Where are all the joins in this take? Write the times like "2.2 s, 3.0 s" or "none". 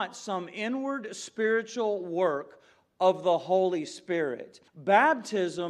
4.7 s